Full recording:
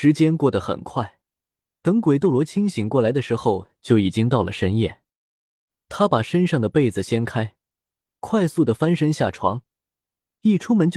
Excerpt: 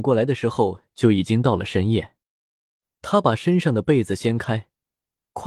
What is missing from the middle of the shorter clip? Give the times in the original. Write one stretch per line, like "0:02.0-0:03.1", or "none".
none